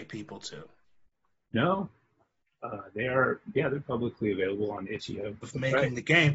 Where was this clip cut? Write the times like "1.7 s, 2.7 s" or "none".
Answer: 5.4 s